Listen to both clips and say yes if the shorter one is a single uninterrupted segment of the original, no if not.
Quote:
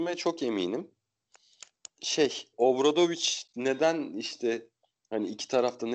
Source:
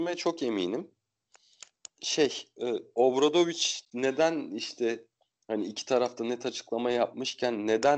no